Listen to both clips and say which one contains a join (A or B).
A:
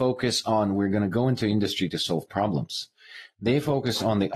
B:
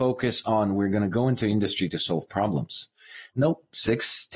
B